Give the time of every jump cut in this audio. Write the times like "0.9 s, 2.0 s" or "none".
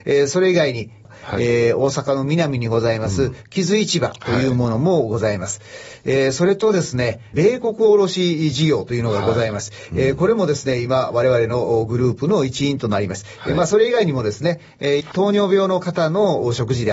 13.4 s, 15.0 s